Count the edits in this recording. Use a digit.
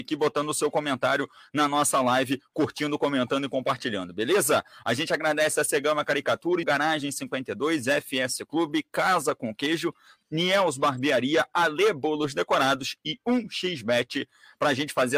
2